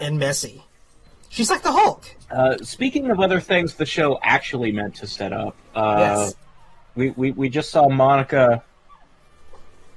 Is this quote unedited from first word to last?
no; 1 cut; at 2.2 s

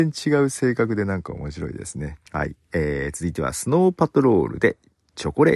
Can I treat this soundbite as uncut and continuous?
no; 1 cut; at 2.3 s

